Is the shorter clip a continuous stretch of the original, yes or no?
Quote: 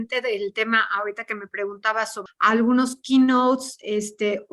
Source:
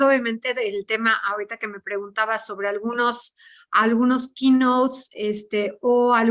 no